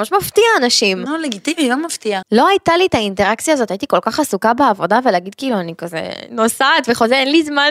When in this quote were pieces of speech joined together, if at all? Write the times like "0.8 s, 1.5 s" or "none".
2.2 s